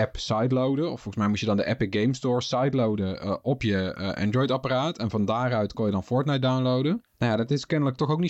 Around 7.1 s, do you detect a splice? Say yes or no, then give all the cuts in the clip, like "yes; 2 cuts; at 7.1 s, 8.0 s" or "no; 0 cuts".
yes; 1 cut; at 7.1 s